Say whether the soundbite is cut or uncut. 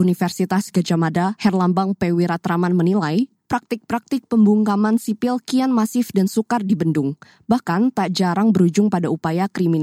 uncut